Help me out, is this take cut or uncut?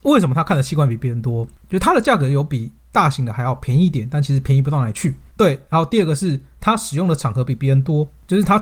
cut